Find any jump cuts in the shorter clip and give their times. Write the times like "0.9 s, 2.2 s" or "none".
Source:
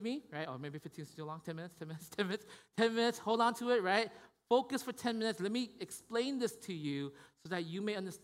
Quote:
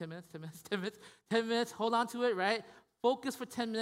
none